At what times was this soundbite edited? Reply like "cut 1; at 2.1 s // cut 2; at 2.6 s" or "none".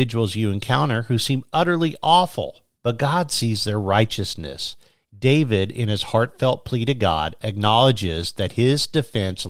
cut 1; at 5.1 s